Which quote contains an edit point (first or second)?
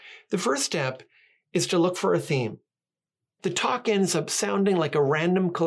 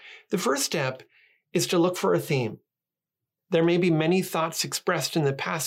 first